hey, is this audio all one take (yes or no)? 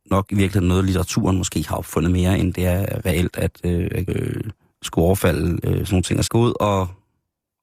no